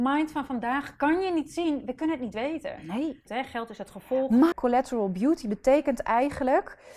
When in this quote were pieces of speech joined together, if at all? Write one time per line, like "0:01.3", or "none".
0:03.3
0:04.5